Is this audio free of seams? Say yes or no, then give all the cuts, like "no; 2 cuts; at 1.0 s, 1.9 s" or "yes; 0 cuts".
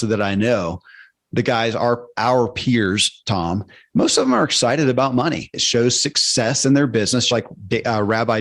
no; 2 cuts; at 5.5 s, 7.3 s